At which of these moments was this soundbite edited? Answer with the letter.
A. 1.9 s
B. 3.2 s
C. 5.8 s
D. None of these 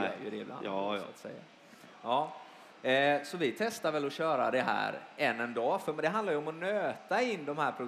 D